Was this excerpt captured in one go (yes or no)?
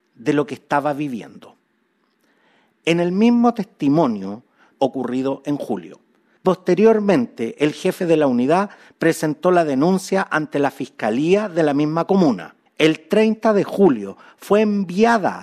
no